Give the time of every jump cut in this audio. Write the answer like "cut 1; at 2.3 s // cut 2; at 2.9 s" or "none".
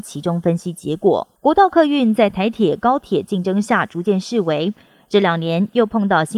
cut 1; at 1.4 s